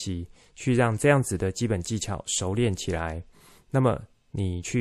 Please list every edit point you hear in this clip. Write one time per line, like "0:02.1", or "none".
none